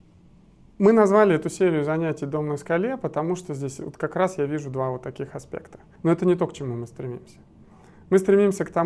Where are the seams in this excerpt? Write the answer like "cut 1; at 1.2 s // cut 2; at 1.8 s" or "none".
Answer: cut 1; at 5.9 s